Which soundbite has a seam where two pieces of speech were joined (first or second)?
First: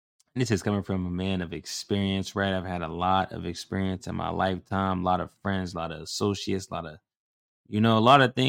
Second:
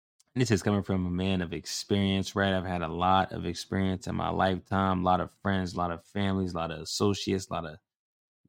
first